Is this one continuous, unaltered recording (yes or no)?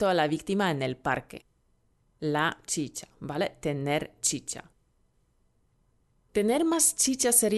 yes